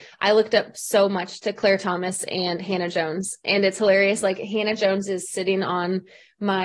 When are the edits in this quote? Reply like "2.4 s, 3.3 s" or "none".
none